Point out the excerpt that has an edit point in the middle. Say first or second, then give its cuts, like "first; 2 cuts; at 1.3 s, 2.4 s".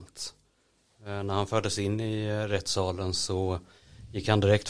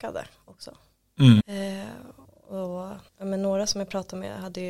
second; 2 cuts; at 1.4 s, 3.1 s